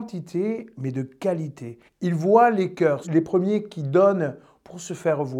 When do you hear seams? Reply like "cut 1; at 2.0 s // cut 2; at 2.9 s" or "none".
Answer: cut 1; at 1.9 s // cut 2; at 3.0 s